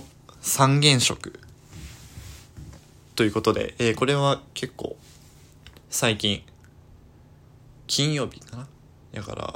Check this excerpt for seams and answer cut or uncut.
uncut